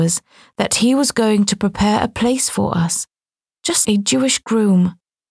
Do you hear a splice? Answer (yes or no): yes